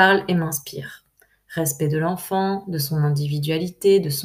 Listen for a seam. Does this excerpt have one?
no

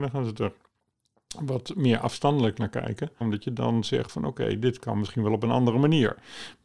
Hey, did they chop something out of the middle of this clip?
yes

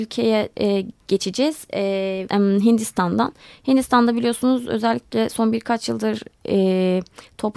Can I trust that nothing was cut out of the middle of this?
no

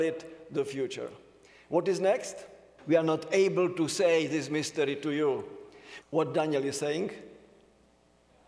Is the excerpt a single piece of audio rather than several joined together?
no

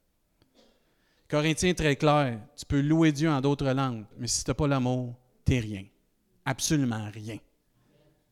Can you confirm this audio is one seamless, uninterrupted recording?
no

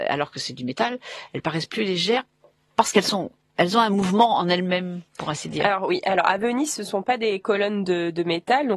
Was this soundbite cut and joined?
no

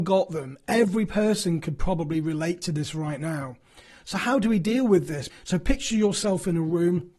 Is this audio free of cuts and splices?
no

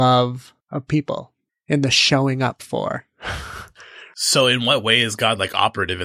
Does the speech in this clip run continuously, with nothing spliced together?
yes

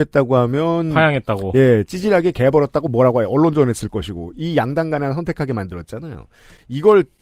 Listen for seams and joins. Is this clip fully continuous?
yes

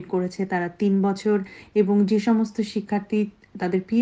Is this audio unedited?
yes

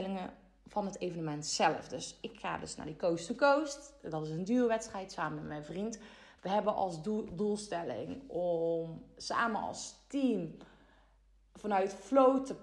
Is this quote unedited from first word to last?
yes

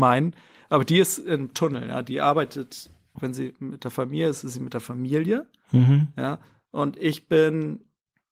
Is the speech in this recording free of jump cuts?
no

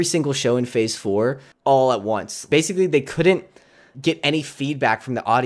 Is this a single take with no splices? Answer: no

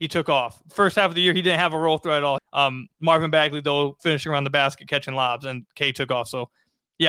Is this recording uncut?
no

